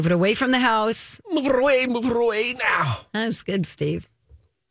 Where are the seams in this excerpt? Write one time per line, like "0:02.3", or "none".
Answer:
0:01.9